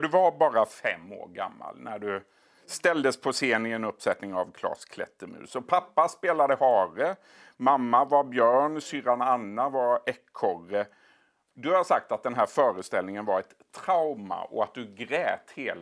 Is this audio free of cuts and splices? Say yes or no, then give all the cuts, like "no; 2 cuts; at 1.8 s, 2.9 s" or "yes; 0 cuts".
yes; 0 cuts